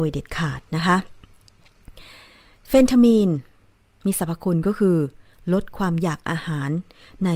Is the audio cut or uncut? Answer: uncut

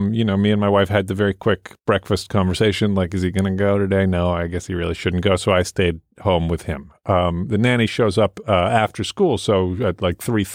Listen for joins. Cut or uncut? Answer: uncut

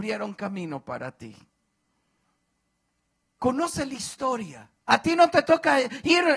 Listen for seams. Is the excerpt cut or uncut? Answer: cut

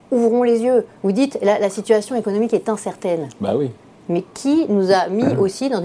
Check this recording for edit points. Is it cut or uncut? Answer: uncut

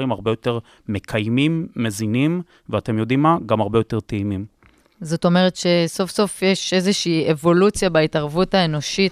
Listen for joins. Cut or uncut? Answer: uncut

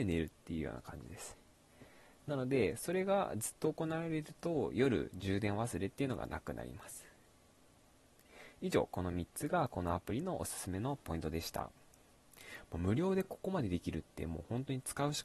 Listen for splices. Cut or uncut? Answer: uncut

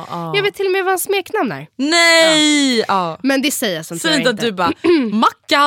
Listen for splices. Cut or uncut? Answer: uncut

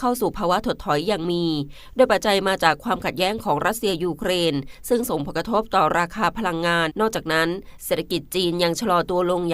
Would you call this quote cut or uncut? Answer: cut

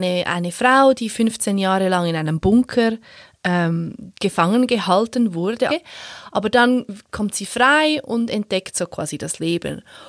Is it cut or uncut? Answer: cut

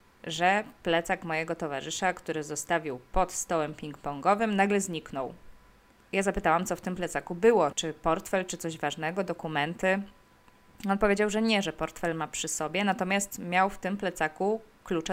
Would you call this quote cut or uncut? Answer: uncut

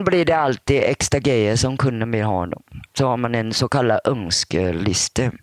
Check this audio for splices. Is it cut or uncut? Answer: cut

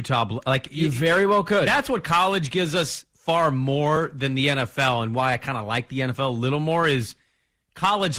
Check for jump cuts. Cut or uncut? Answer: uncut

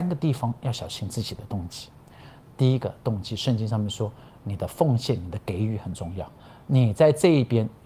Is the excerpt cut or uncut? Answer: uncut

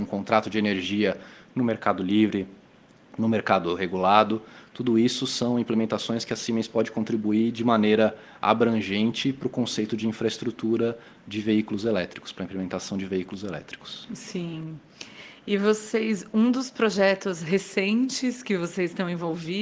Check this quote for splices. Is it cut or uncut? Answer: uncut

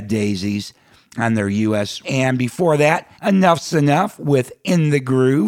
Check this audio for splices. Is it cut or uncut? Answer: cut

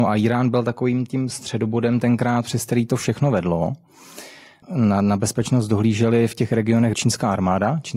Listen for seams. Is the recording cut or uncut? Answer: cut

